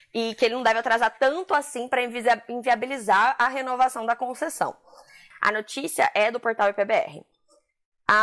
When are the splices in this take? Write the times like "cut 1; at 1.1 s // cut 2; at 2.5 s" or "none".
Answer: cut 1; at 5.3 s